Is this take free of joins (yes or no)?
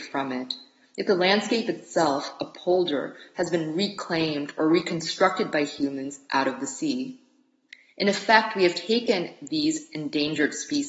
yes